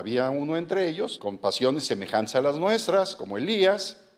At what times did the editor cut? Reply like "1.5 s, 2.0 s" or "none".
1.2 s